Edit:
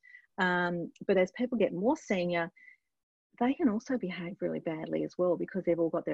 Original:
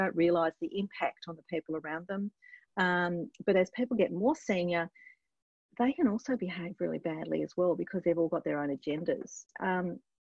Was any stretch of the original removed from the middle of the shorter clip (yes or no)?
no